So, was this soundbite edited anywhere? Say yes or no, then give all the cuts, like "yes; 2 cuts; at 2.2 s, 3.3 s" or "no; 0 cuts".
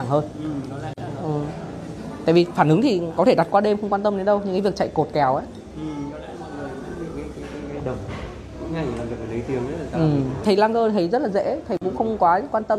yes; 2 cuts; at 7.8 s, 10.4 s